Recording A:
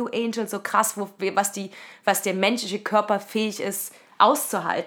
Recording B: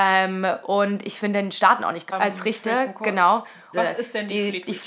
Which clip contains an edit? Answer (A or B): B